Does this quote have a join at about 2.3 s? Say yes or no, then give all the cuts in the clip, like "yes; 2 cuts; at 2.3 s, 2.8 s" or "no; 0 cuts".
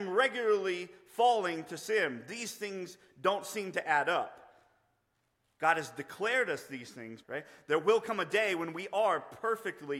no; 1 cut; at 7.2 s